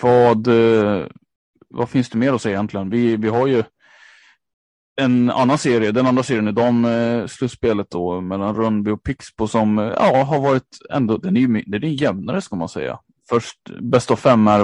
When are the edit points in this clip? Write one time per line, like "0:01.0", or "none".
0:13.2

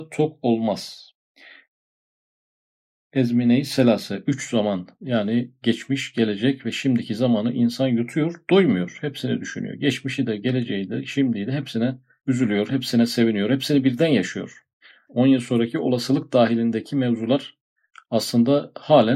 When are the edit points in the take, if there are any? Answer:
0:15.1

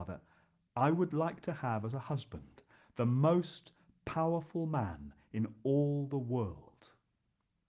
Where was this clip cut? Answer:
none

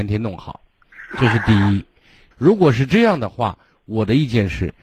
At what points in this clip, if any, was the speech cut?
0:02.3

